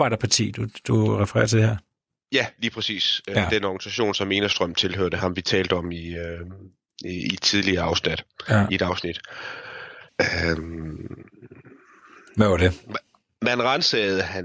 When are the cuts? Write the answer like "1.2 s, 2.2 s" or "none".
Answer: 10.1 s